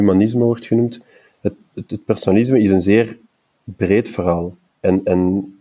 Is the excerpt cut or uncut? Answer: cut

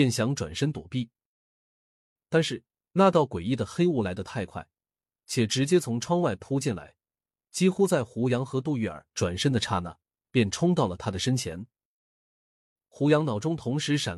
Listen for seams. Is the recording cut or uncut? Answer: uncut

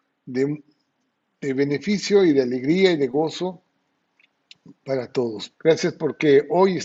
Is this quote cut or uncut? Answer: cut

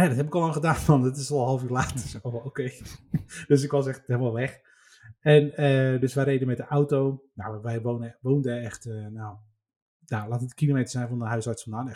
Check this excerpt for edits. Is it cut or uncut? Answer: uncut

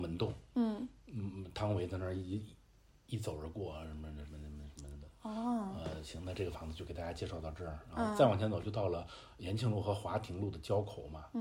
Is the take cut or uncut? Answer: uncut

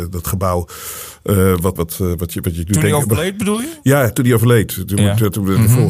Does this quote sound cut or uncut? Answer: cut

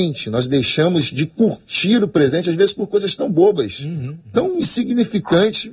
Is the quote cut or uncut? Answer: uncut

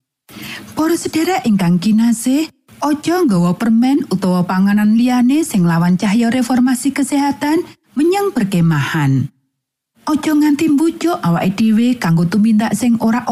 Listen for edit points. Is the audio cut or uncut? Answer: cut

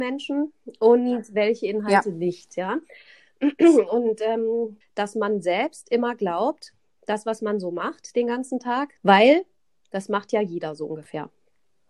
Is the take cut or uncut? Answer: cut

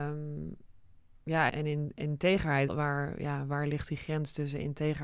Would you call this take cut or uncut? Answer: cut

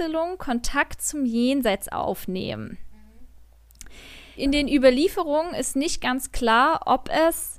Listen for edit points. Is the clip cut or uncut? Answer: cut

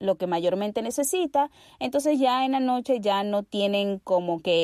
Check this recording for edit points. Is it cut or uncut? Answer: uncut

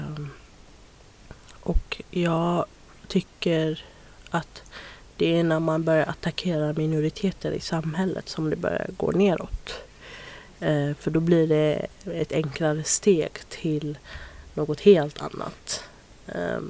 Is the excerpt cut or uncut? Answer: uncut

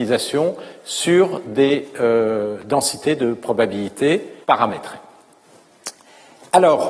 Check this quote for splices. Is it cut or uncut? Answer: cut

